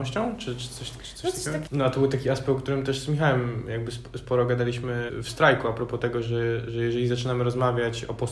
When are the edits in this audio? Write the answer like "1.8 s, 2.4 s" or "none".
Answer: 1.7 s